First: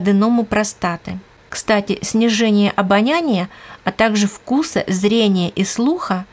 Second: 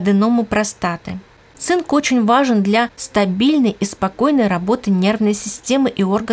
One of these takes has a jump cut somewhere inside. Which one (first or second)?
first